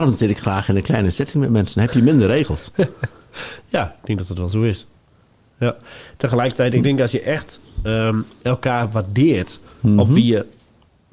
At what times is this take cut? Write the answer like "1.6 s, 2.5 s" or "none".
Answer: none